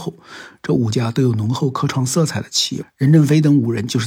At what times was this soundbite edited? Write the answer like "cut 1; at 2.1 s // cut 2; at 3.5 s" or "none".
cut 1; at 2.8 s